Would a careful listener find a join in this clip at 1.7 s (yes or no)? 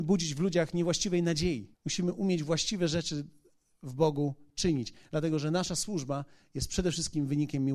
yes